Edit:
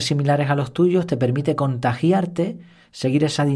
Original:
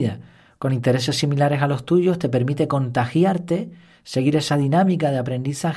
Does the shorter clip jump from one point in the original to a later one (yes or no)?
no